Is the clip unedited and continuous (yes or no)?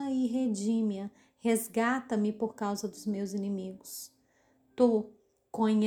yes